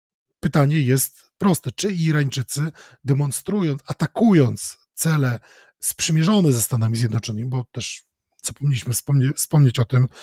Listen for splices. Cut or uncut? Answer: uncut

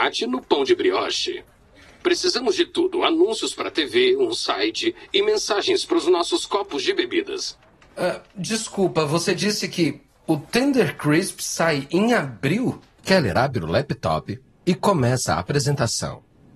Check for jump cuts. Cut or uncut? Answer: cut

